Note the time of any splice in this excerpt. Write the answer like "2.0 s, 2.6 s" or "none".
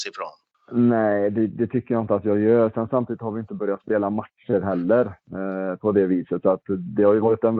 none

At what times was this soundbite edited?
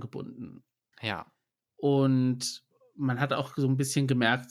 0.9 s

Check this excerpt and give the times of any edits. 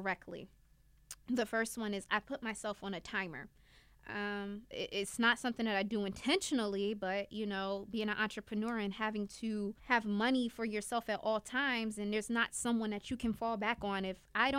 4.7 s, 9.8 s

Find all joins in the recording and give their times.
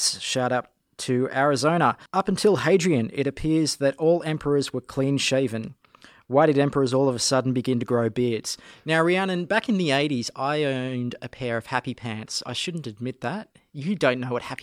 2.1 s

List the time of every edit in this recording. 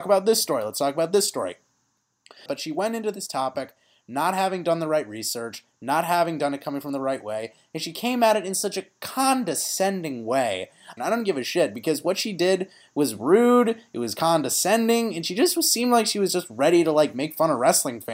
2.5 s, 11.0 s

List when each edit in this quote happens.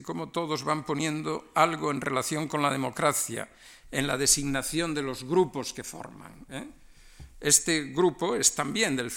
7.3 s

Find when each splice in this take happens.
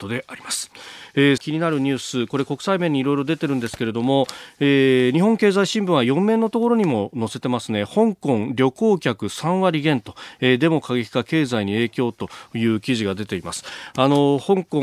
1.4 s

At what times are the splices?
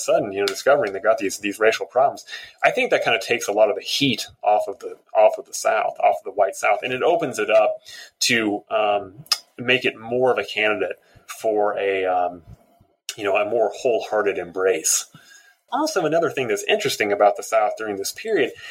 15.7 s

